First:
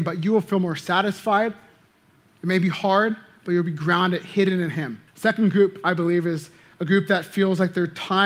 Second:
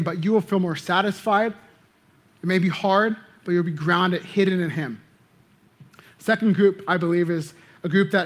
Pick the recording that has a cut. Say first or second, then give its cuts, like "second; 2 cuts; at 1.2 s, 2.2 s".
first; 1 cut; at 5.1 s